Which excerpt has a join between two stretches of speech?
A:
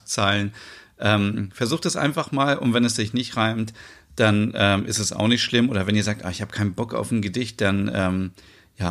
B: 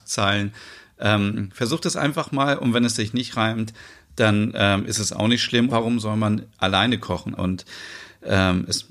B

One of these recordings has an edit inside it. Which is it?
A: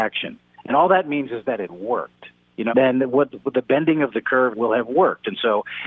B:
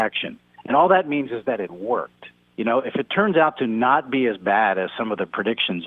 A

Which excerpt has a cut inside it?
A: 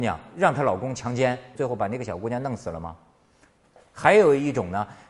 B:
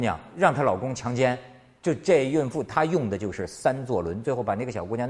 A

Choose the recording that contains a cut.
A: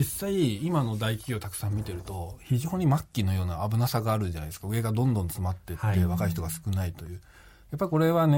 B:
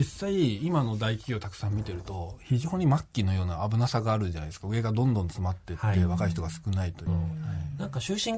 B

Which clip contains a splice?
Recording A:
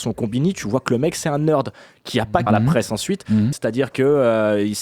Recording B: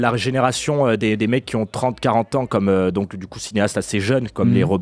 A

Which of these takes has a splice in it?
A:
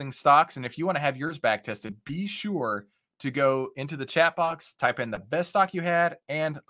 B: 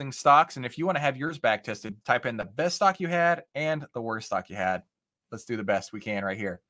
B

